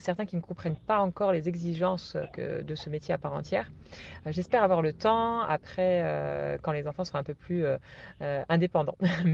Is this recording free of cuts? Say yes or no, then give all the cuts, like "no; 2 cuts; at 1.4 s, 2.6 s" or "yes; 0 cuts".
yes; 0 cuts